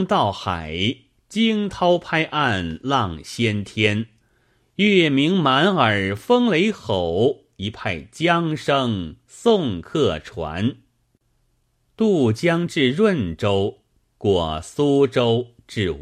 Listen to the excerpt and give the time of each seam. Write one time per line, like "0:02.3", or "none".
0:14.0